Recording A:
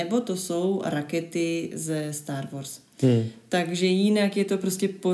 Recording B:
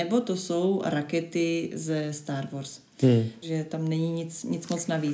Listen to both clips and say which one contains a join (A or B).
B